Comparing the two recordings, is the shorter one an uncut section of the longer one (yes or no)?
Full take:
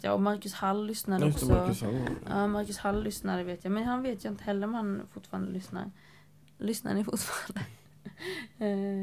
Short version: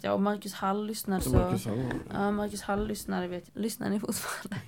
no